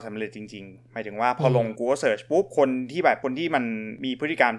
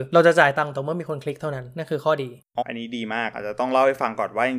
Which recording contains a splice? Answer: second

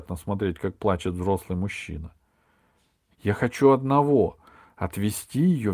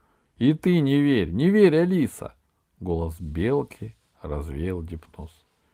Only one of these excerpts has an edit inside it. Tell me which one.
first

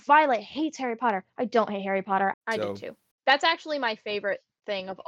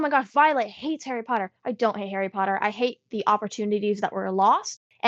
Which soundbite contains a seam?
first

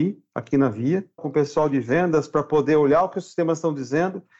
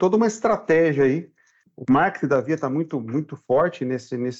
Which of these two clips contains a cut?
first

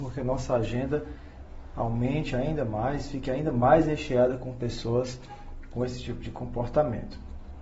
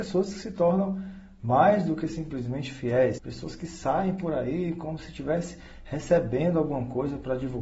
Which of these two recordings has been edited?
second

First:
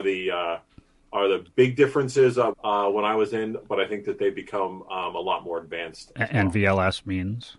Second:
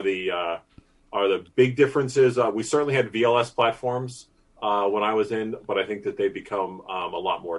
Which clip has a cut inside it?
first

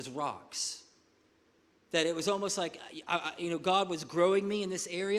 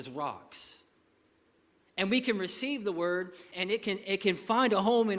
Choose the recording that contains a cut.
second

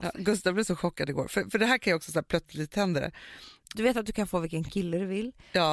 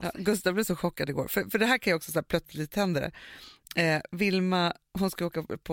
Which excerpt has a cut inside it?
first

